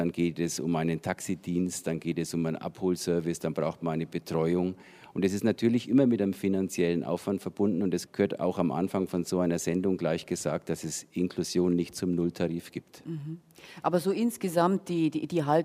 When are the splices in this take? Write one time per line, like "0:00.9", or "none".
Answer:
0:08.1